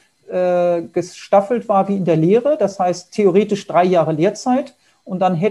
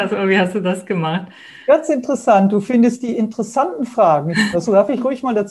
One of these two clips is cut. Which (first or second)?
second